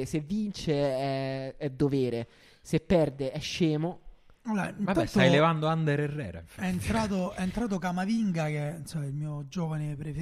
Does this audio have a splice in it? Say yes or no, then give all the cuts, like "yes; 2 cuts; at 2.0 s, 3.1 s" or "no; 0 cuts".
no; 0 cuts